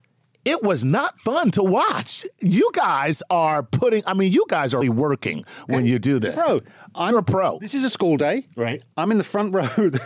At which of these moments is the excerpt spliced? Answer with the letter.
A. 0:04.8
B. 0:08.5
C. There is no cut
A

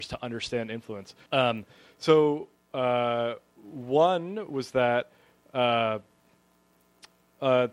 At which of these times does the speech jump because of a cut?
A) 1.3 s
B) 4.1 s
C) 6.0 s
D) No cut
A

